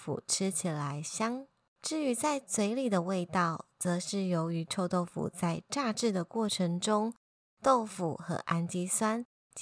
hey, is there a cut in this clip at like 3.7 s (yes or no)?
no